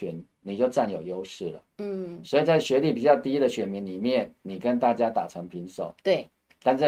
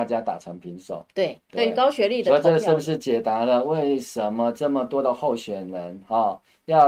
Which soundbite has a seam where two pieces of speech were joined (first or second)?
second